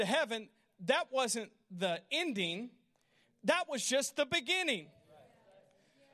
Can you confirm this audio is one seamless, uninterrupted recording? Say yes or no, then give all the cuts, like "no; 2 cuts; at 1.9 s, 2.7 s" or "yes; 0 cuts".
yes; 0 cuts